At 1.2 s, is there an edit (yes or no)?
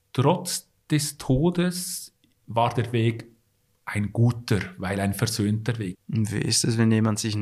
no